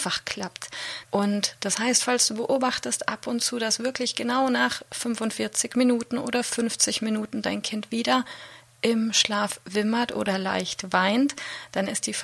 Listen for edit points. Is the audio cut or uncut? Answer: cut